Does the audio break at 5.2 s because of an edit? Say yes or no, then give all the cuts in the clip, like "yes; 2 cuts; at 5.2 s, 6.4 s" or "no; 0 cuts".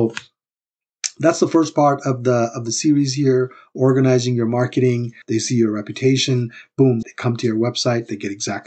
yes; 2 cuts; at 5.2 s, 7.0 s